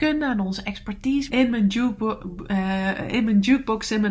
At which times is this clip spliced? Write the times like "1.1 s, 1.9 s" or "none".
1.3 s